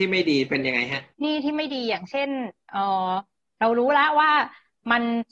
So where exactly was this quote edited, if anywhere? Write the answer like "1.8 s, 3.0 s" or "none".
1.1 s